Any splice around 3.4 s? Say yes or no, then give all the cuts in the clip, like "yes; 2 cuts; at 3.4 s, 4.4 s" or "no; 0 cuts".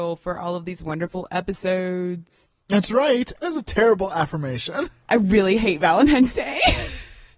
yes; 2 cuts; at 3.4 s, 5.0 s